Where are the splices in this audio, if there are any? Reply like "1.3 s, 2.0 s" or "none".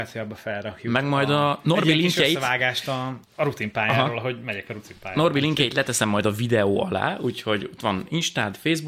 3.2 s